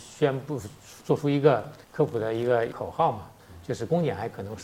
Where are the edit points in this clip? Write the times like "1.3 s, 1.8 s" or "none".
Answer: 1.8 s